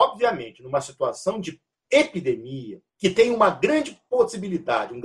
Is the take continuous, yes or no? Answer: no